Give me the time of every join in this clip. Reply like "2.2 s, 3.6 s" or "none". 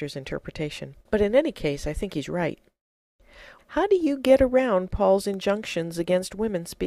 1.0 s, 3.6 s